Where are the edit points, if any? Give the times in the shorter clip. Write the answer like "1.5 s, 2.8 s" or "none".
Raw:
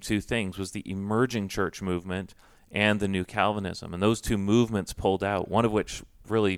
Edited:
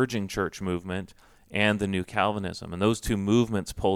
none

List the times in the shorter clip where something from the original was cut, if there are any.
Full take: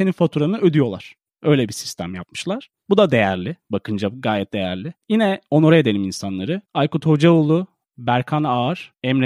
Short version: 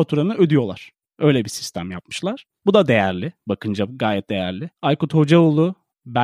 4.7 s

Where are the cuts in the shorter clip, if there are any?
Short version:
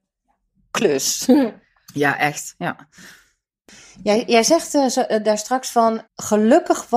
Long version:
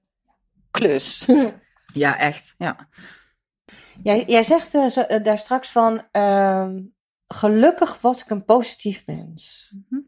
6.1 s

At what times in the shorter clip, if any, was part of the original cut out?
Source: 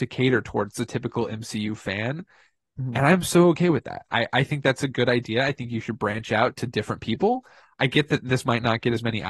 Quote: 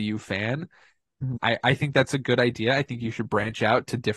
1.4 s

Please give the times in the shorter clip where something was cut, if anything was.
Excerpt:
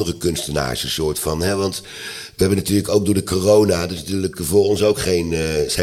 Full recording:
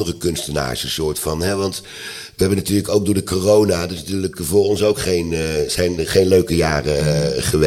none

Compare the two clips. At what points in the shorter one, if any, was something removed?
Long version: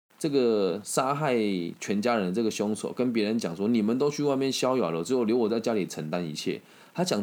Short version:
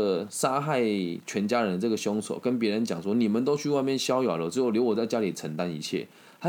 none

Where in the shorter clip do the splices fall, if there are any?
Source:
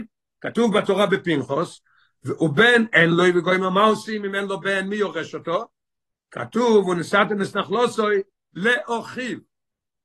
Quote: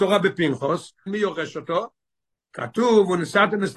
1.1 s

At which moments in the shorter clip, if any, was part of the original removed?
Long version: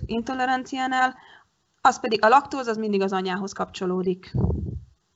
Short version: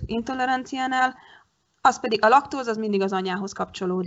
none

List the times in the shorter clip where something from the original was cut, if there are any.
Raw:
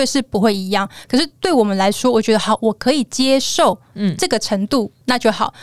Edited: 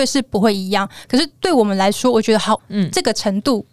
2.6 s

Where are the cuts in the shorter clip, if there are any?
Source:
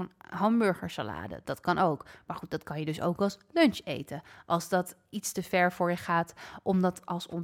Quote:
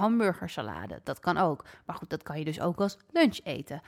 none

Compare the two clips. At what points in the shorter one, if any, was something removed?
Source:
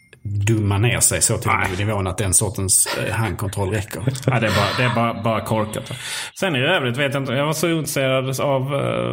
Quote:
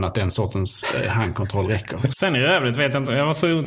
2.1 s

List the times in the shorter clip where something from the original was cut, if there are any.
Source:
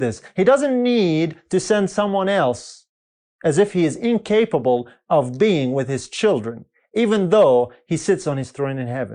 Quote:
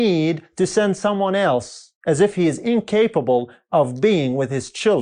2.0 s

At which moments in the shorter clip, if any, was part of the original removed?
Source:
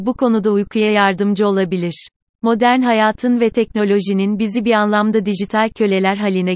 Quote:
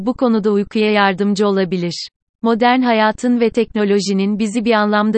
none

